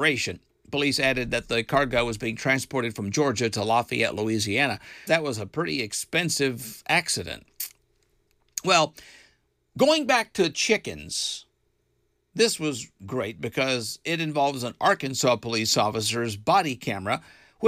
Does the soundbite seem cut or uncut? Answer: cut